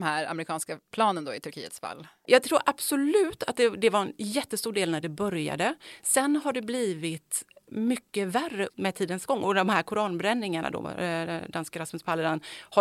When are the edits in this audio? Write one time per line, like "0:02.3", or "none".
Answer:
none